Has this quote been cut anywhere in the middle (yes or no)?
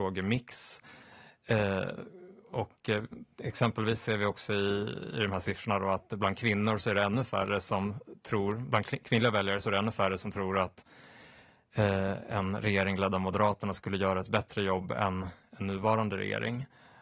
no